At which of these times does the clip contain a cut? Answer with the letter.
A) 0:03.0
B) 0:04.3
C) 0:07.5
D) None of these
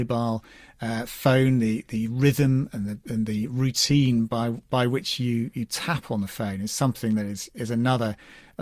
C